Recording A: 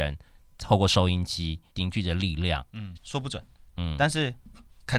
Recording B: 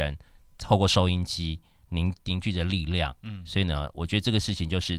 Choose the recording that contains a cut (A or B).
A